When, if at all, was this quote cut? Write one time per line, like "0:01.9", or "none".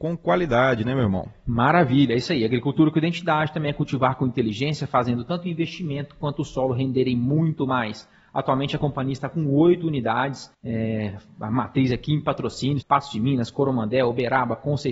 0:10.5
0:12.8